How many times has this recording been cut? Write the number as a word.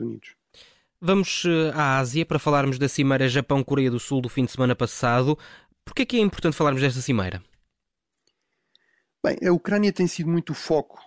zero